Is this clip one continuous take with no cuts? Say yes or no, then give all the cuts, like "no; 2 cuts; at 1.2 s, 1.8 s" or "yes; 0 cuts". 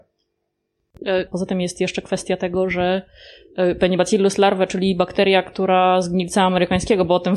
no; 1 cut; at 1.3 s